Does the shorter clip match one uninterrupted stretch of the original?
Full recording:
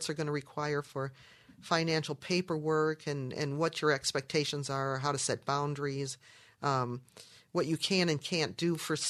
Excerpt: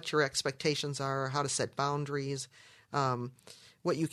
yes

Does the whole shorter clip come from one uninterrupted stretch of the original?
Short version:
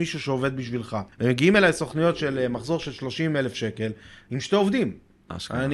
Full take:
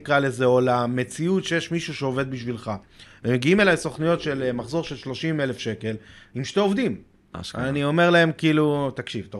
no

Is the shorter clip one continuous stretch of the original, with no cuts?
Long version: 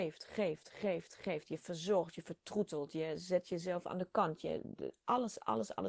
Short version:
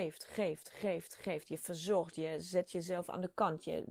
no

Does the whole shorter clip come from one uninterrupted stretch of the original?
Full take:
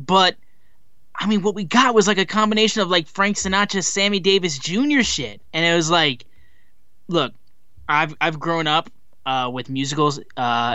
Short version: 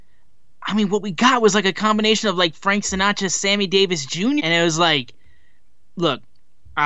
no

